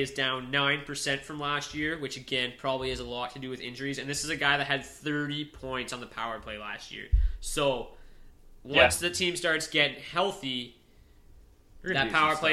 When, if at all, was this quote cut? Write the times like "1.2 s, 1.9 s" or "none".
none